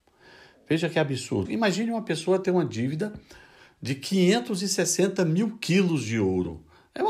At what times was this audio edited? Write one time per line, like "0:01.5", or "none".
0:01.4